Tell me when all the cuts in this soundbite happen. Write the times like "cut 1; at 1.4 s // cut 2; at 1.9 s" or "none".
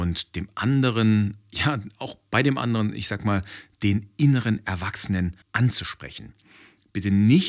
cut 1; at 5.4 s